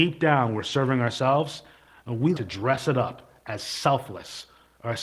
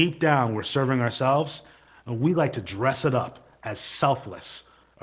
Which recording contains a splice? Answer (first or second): first